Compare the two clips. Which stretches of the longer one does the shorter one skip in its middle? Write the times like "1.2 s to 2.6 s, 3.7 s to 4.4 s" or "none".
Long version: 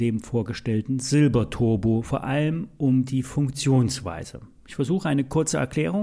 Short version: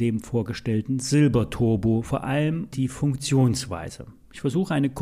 2.7 s to 3.1 s